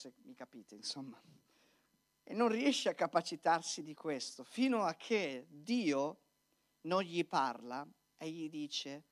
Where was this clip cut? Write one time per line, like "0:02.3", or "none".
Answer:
none